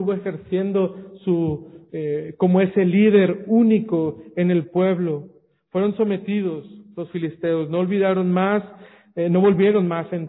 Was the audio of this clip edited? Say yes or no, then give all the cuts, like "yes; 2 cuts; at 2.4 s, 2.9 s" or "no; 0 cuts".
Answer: no; 0 cuts